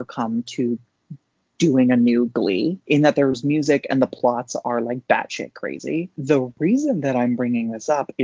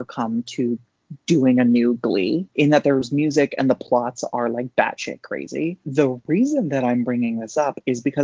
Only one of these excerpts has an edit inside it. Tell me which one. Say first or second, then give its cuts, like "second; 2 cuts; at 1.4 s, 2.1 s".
second; 1 cut; at 1.2 s